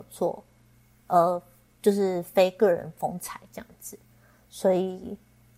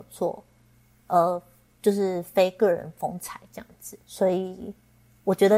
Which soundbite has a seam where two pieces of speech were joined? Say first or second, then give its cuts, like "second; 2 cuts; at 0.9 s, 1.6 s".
second; 1 cut; at 4.0 s